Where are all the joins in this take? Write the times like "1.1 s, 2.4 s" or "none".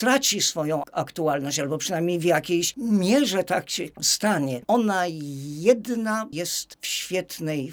4.6 s